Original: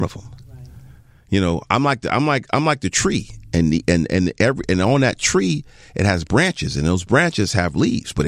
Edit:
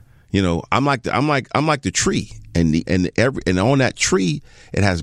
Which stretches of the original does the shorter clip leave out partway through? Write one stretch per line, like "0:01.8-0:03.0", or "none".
0:03.8-0:04.1